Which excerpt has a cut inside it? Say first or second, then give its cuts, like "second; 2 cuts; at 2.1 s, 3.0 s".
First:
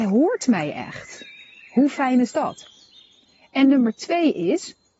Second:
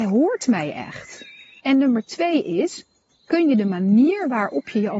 second; 1 cut; at 1.6 s